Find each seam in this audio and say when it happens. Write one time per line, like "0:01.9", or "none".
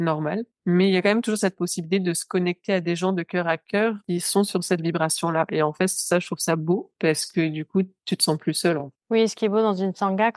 none